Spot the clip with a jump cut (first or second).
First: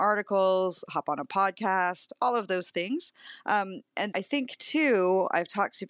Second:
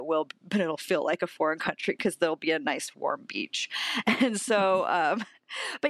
first